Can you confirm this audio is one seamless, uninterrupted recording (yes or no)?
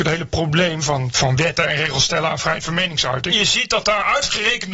no